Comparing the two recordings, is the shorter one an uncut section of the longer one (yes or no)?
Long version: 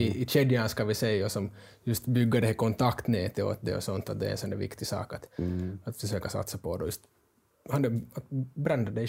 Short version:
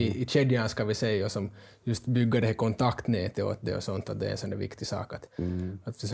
yes